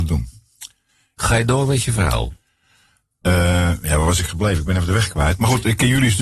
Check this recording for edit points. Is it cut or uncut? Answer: cut